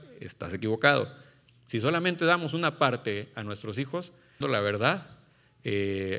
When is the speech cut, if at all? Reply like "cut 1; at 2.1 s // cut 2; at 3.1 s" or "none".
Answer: cut 1; at 1.5 s // cut 2; at 4.4 s